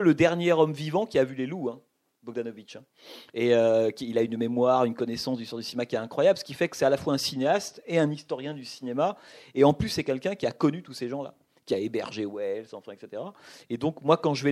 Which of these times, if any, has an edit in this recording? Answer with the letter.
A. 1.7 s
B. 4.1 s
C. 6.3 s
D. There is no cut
D